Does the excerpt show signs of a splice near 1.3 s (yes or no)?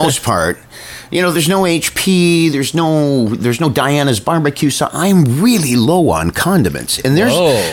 no